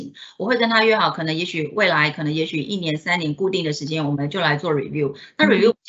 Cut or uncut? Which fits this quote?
uncut